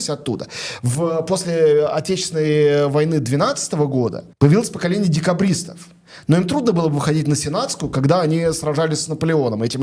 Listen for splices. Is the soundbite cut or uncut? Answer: cut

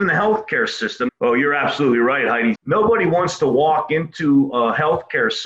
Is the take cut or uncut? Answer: cut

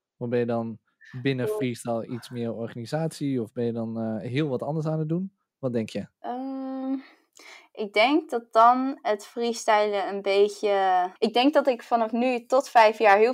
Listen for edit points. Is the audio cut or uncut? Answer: cut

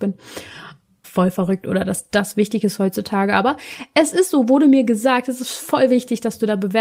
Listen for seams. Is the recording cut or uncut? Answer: cut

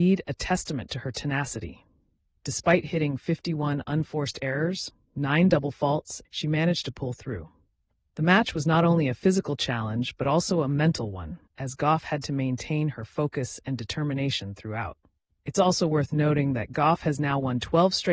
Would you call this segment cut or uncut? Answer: cut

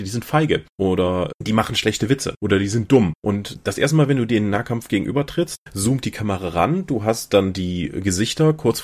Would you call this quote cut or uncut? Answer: uncut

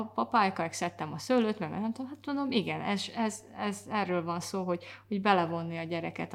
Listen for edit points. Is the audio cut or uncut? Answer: uncut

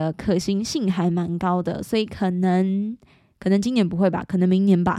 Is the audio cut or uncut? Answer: uncut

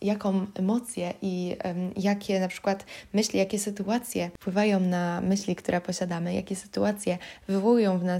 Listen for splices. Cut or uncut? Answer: uncut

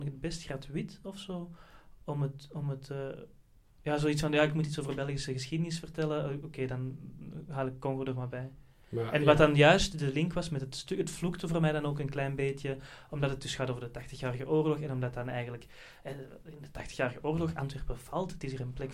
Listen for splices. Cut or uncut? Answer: uncut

